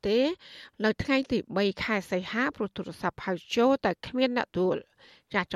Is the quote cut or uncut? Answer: cut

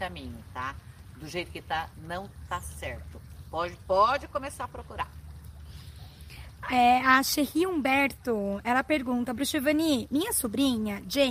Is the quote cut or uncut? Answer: uncut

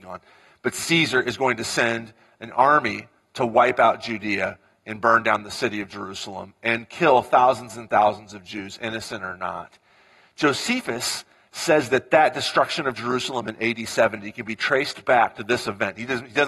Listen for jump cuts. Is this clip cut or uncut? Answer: uncut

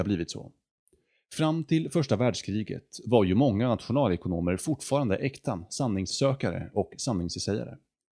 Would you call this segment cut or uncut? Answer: uncut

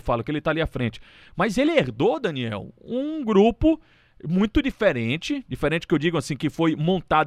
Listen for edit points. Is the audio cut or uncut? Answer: uncut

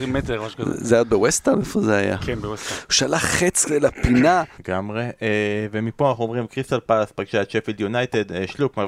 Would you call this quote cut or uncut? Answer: cut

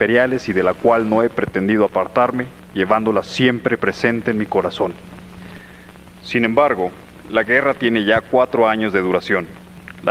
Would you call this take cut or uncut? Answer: uncut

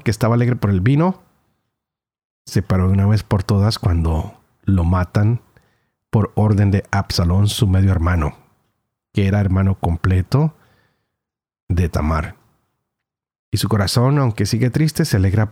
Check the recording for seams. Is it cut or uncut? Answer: cut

